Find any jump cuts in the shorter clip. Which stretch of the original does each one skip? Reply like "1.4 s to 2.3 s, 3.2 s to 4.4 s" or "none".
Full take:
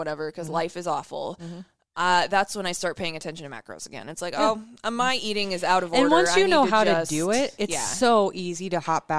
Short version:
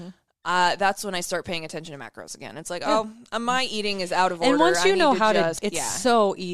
7.1 s to 7.5 s